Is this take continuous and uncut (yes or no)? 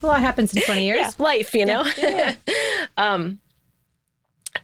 yes